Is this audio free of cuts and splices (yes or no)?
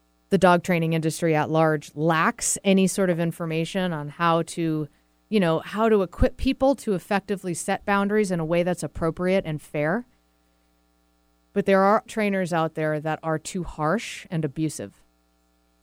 no